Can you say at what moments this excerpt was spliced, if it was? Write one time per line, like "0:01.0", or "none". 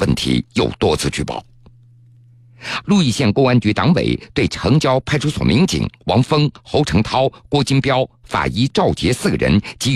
0:02.8